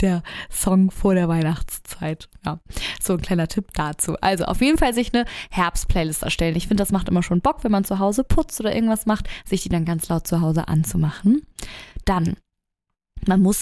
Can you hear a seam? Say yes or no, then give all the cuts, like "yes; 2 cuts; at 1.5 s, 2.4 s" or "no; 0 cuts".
no; 0 cuts